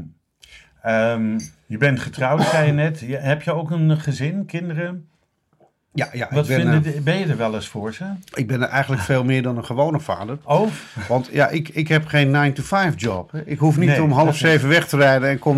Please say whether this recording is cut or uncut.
uncut